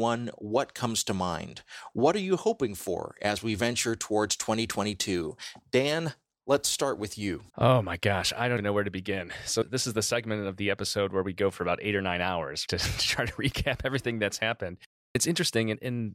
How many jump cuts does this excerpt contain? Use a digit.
3